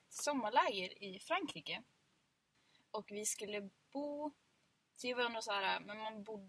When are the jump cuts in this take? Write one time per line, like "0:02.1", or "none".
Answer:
none